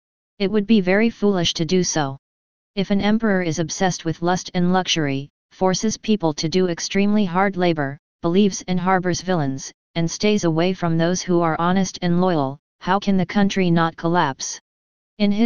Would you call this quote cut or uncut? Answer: uncut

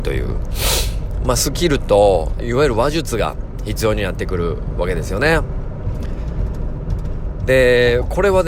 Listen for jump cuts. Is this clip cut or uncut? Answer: cut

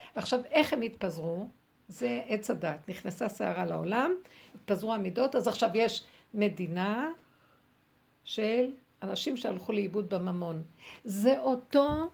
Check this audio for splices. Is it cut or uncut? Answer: uncut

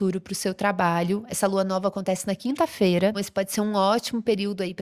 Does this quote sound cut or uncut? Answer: cut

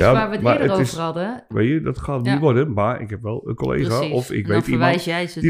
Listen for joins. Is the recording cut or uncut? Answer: cut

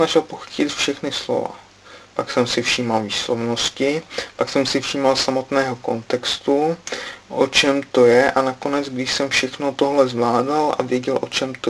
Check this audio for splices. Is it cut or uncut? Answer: uncut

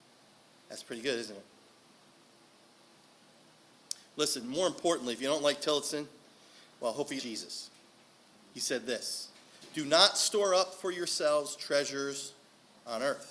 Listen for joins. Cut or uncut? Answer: cut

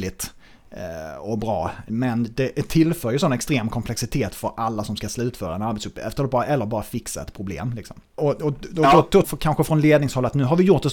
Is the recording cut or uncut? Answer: cut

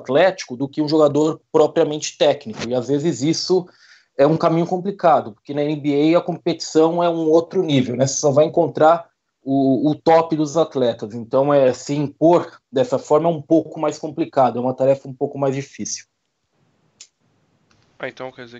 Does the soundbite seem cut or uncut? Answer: uncut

